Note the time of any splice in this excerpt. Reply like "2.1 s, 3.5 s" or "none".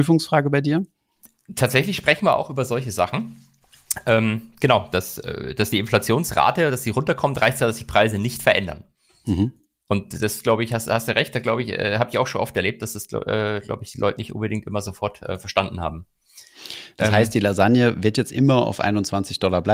none

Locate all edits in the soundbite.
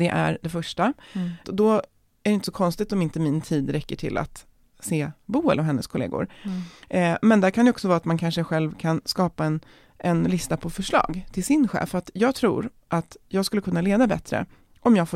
1.4 s

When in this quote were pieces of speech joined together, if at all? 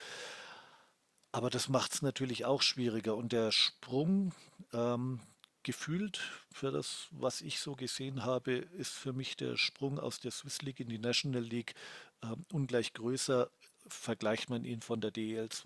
none

